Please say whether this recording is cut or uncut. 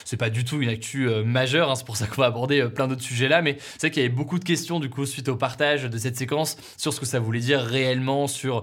uncut